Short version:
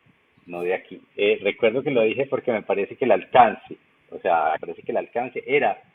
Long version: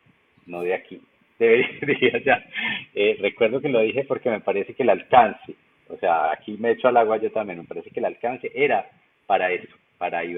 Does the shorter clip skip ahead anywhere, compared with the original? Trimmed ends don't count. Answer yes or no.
yes